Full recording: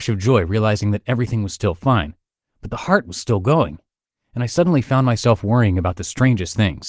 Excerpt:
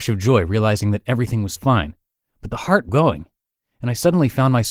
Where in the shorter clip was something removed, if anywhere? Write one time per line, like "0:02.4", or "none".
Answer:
0:01.6
0:02.9